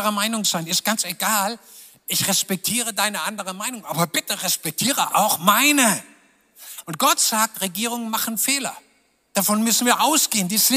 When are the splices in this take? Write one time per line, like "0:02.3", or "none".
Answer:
none

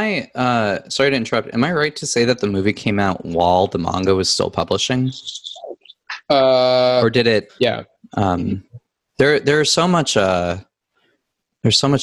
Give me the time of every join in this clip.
0:07.5

